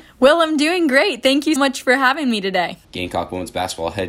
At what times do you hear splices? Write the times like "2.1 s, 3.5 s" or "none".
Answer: 1.6 s, 2.8 s